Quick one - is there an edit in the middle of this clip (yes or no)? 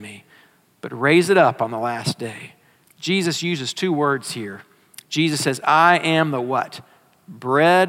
yes